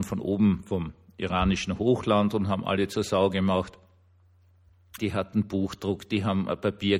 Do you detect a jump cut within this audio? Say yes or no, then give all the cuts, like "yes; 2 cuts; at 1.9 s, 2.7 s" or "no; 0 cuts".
yes; 1 cut; at 5.0 s